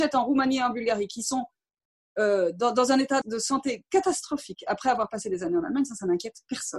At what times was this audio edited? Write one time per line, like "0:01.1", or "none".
0:03.2